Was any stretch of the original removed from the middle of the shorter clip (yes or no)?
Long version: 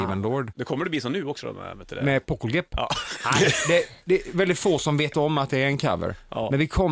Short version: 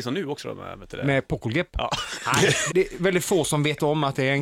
yes